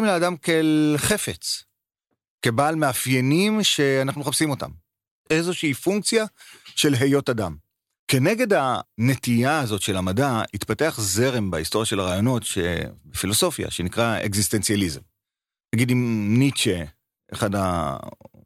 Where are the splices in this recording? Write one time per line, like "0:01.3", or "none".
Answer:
none